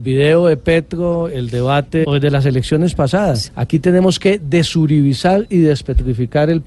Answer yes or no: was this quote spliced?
yes